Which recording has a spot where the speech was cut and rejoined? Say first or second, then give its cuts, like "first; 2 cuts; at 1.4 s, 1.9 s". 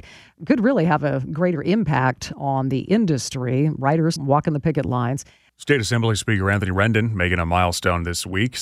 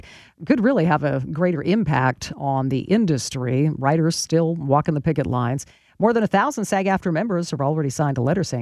first; 2 cuts; at 4.2 s, 5.5 s